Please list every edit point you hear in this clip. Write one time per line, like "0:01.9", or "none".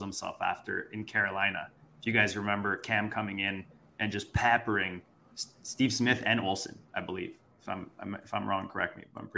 none